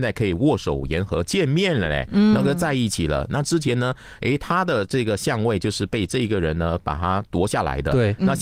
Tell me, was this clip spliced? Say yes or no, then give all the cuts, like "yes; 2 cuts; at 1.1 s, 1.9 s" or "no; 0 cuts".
no; 0 cuts